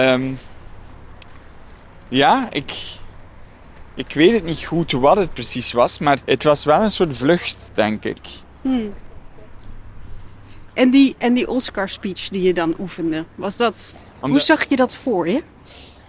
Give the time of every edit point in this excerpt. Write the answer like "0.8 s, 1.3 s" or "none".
6.2 s